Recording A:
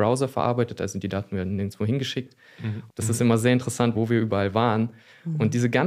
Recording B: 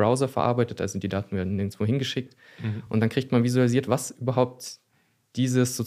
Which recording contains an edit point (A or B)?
A